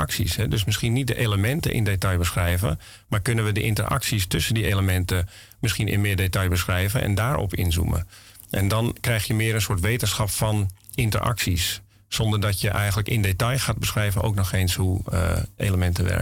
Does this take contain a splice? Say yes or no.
no